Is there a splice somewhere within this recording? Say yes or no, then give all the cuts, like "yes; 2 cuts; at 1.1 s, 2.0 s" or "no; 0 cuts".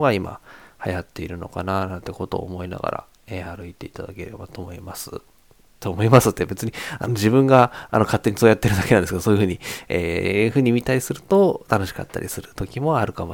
no; 0 cuts